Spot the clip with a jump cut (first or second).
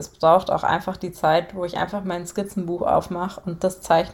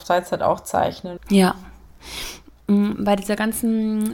second